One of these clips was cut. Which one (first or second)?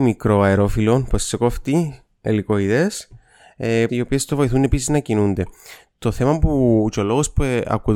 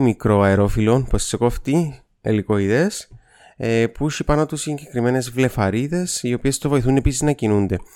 first